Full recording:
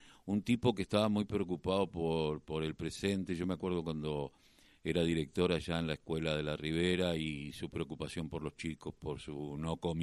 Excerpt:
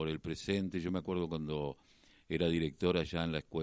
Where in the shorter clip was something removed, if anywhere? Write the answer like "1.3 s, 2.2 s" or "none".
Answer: none